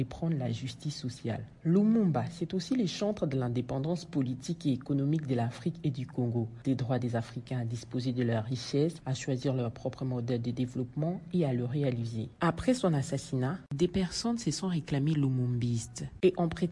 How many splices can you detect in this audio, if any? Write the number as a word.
one